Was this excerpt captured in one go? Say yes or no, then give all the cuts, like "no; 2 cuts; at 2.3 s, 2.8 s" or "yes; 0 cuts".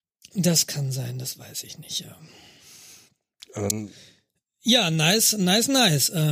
yes; 0 cuts